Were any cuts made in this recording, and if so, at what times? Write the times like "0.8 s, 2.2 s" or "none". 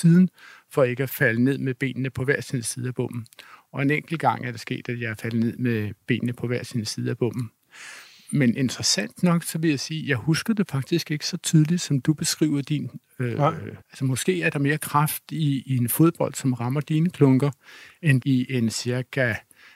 13.8 s, 18.2 s